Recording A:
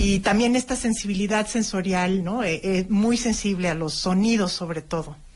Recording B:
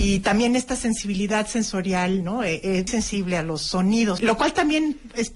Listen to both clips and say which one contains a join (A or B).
B